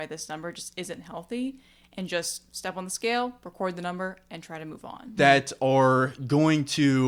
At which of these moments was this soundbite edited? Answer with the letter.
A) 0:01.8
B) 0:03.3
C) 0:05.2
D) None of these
C